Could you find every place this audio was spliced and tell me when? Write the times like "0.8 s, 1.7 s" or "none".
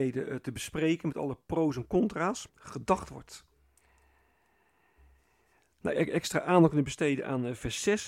2.5 s, 5.9 s